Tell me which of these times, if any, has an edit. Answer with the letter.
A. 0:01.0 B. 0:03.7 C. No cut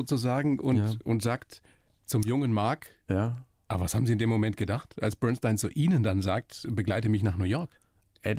B